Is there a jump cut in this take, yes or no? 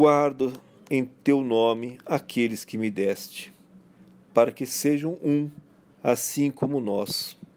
no